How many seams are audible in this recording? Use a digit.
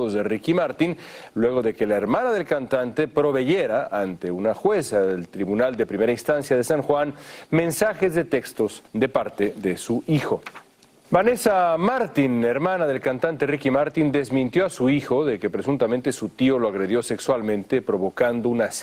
2